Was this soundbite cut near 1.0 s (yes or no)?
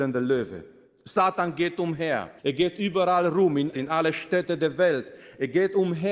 no